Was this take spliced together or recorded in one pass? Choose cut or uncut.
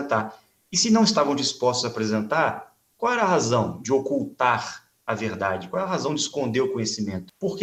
uncut